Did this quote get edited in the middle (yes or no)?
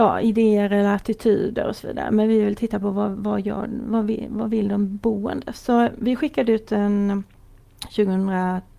no